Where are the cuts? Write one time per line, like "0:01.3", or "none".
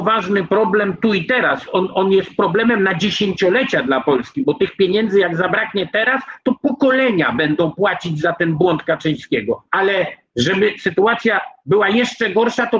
0:09.7